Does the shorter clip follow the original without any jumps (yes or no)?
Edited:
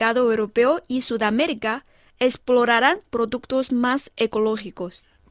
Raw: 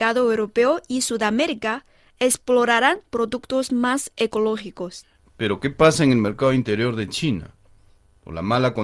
yes